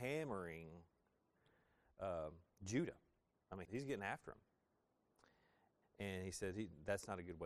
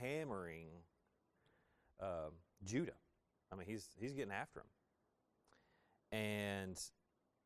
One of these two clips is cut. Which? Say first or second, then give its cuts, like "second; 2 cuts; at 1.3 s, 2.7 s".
first; 2 cuts; at 3.6 s, 5.8 s